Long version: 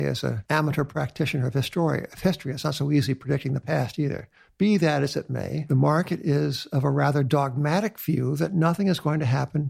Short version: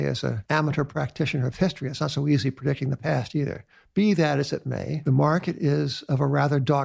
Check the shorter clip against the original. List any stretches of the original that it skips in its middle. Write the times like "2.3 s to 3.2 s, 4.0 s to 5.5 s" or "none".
1.5 s to 2.2 s